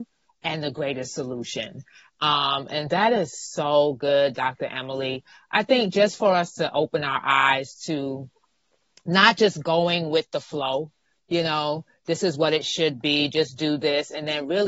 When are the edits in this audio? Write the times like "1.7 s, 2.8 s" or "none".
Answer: 2.9 s